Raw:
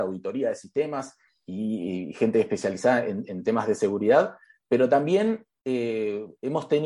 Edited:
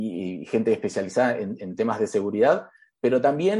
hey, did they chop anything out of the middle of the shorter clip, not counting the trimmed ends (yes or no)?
no